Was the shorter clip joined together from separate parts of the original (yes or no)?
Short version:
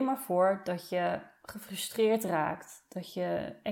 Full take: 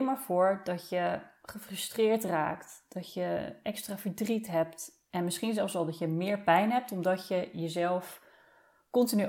no